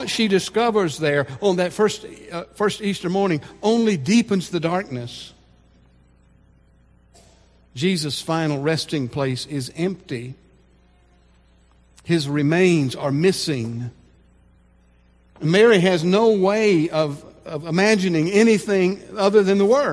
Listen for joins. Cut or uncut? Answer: uncut